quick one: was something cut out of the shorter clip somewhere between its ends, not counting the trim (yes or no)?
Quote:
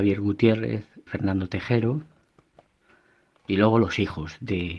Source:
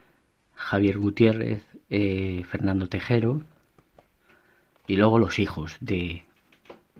yes